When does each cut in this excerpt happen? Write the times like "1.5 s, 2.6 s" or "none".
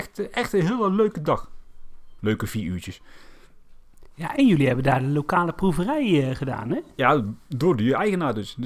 2.2 s